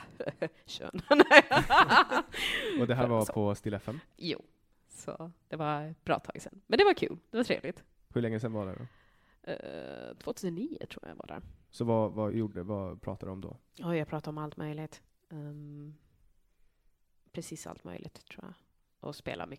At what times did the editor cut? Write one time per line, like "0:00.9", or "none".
0:12.3